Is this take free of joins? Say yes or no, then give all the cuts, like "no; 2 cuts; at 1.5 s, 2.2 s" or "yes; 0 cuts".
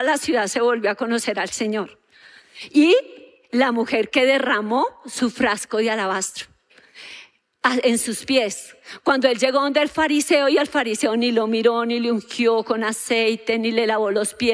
yes; 0 cuts